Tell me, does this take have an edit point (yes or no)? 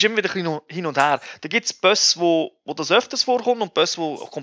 no